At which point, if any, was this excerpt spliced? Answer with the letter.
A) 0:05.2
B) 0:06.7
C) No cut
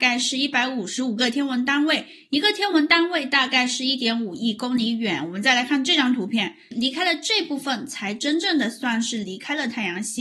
B